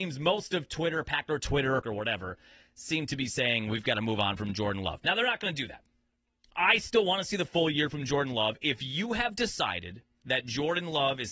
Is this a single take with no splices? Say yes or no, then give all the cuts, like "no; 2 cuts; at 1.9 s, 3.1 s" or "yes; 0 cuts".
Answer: no; 1 cut; at 1.8 s